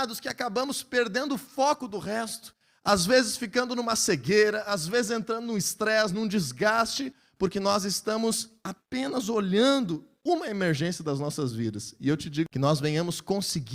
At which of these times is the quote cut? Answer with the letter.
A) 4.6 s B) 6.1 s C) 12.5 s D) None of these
C